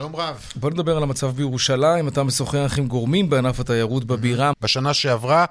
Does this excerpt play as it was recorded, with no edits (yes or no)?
no